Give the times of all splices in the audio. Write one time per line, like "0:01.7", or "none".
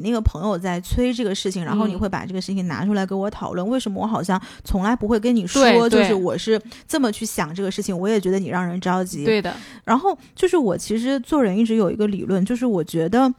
0:08.0